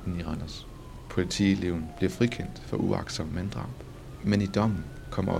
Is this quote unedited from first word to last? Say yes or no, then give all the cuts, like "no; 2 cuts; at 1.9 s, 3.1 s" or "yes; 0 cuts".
yes; 0 cuts